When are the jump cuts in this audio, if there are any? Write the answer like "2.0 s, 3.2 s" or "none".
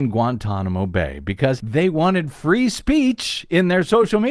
1.6 s

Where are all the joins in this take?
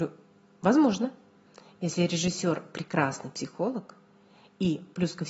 none

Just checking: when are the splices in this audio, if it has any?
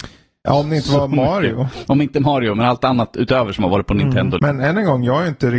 4.4 s

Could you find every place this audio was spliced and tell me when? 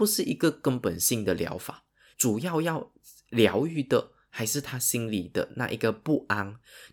2.1 s

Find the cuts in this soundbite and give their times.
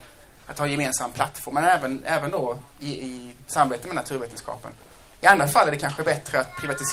5.1 s

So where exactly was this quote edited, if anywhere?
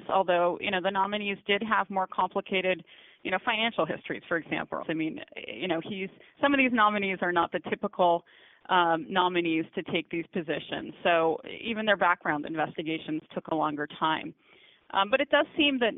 4.8 s

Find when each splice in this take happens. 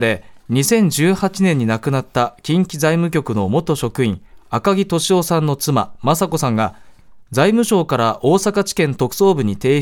none

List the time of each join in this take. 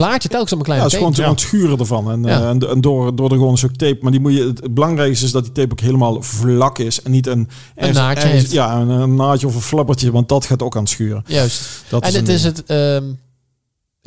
none

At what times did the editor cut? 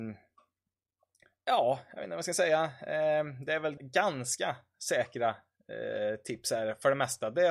3.8 s

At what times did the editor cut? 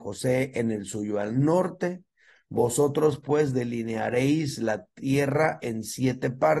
none

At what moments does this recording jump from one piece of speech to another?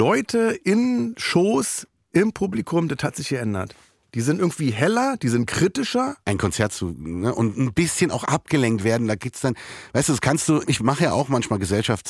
6.2 s, 10.6 s

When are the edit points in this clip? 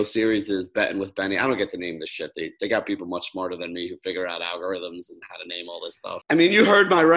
6.2 s

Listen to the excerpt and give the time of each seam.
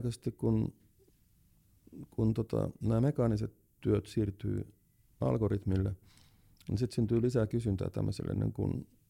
none

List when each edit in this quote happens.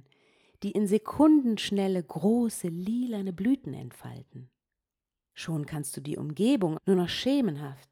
5.3 s, 6.7 s

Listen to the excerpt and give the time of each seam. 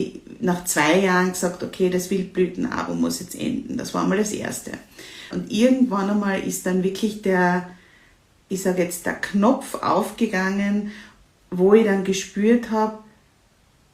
5.3 s

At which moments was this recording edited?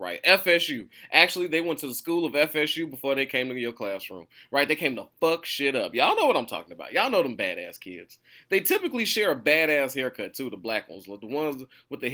none

